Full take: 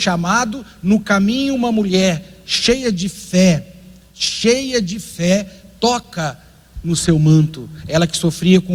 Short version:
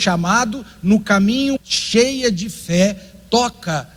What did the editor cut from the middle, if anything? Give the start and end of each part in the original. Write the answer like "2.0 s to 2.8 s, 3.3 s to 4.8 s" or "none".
1.6 s to 4.1 s